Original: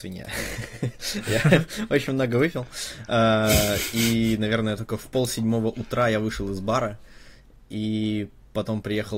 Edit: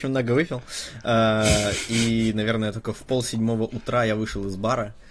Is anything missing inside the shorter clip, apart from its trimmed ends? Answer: no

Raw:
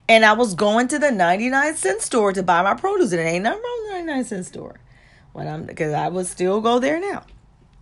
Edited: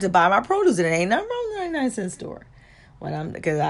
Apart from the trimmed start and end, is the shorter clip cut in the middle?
no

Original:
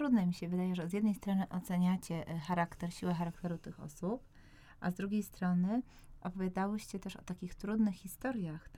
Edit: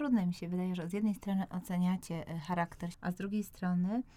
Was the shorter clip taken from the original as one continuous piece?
no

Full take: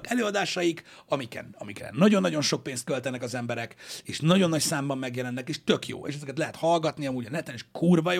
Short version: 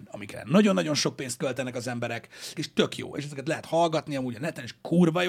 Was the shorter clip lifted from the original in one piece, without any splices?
no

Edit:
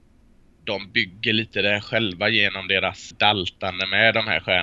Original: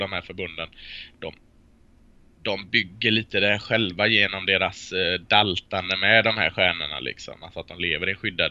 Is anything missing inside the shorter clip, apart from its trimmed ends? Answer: yes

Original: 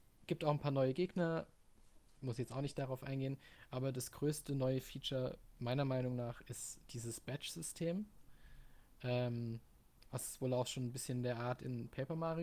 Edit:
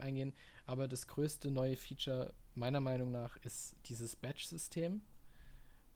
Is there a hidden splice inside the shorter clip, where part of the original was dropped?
no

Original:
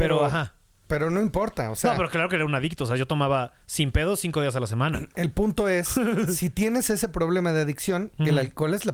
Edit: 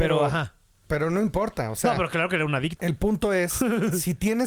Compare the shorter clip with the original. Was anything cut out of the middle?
yes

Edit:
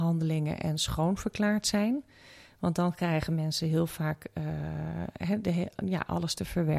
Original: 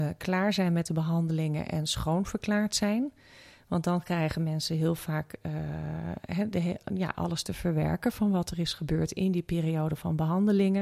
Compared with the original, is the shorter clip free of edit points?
yes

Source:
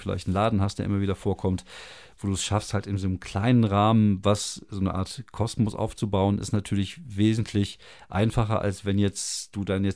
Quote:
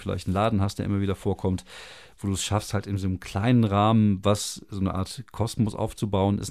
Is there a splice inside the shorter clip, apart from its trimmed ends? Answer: no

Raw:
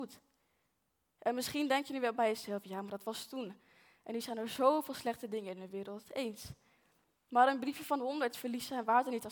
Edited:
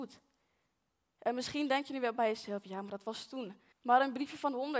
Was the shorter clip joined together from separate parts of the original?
yes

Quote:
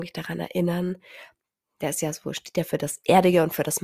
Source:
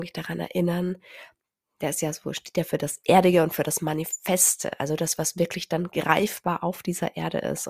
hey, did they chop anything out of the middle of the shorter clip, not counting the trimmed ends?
no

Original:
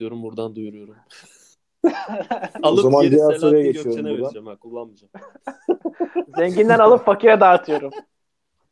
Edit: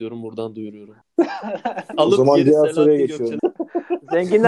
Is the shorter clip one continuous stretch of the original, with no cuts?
no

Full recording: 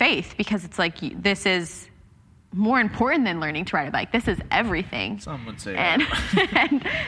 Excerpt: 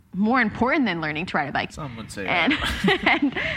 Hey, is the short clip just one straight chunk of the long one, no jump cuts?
no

